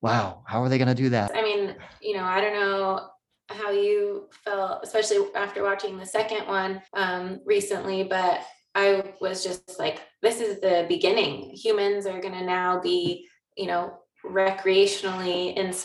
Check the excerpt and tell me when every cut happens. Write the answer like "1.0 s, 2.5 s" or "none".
1.3 s, 6.9 s